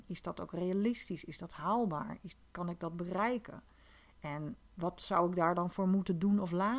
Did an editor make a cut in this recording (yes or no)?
no